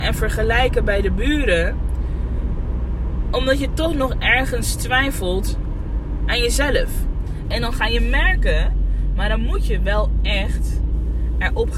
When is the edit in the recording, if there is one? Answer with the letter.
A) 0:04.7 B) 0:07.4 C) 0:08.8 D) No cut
B